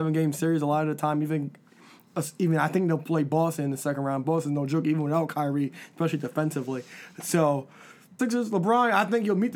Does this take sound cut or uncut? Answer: cut